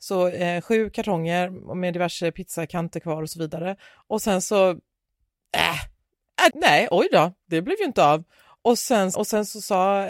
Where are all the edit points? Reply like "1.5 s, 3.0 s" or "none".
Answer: 6.5 s, 9.1 s